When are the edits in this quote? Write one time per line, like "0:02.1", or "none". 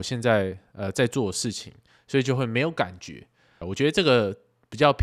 0:03.6

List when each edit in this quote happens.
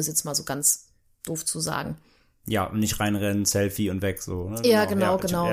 none

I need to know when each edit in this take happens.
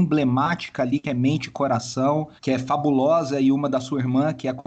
0:02.4

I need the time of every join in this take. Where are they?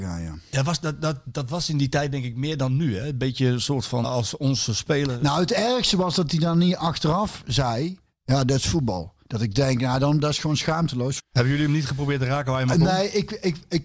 0:04.0
0:09.2
0:11.2

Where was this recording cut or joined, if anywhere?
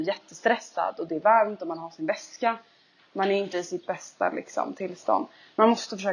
none

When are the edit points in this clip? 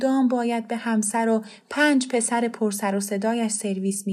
none

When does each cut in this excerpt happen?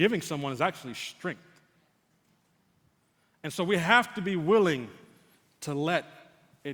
none

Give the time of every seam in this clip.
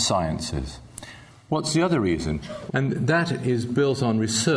0:02.7

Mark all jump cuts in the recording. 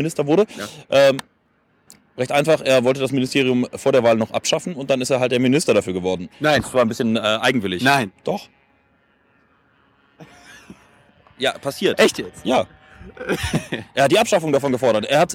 none

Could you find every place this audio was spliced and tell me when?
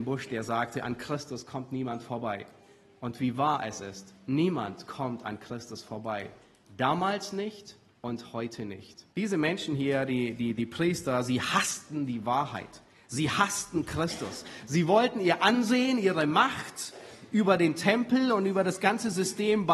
0:09.1

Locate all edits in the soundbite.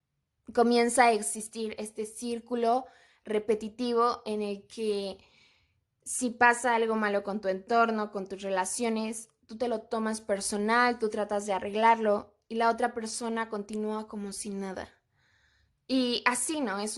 none

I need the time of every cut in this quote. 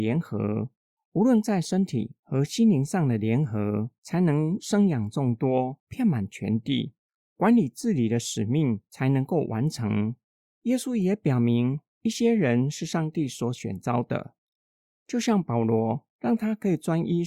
0:10.4

